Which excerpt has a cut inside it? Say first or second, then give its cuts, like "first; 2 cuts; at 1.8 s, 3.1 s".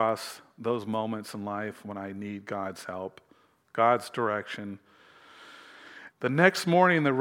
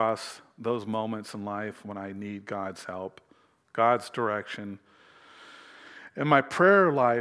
first; 1 cut; at 6.1 s